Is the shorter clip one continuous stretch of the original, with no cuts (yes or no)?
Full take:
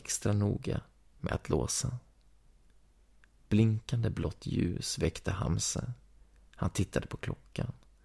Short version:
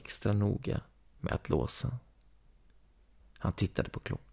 no